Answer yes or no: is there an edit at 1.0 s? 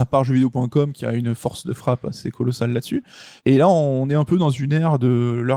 no